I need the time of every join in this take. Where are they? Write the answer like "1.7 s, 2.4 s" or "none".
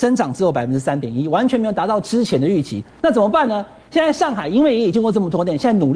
4.9 s